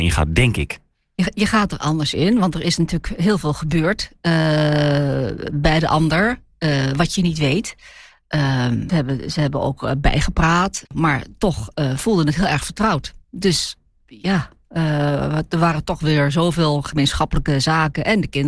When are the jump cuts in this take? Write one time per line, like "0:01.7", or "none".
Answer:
0:08.9